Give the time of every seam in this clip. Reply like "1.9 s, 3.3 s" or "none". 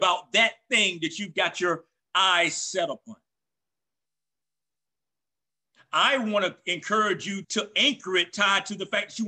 7.4 s

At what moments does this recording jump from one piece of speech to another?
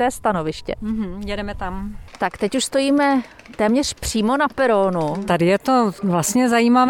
none

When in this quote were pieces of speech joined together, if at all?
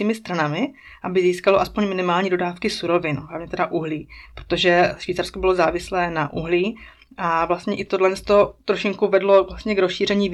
none

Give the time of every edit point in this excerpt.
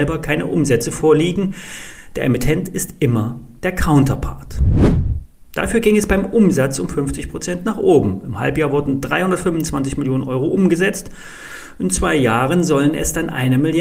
5.5 s

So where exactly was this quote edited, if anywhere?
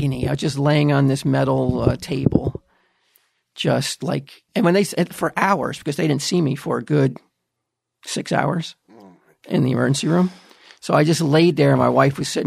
4.5 s

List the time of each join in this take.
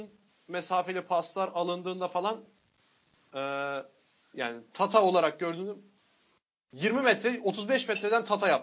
4.3 s

